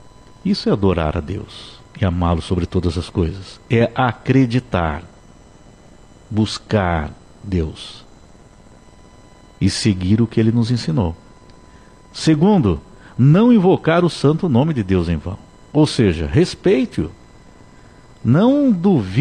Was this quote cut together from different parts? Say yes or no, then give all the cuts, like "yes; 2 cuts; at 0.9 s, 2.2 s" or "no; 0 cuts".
no; 0 cuts